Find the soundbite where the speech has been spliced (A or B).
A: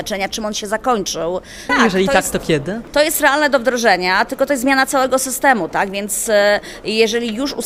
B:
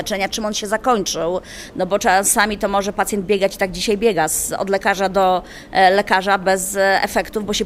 A